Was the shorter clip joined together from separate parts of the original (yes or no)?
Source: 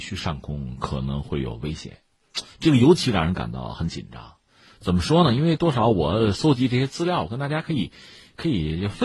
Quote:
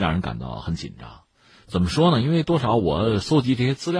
no